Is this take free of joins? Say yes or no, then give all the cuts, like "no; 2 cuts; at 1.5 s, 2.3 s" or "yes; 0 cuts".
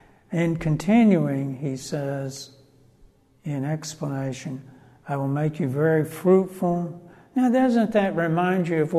yes; 0 cuts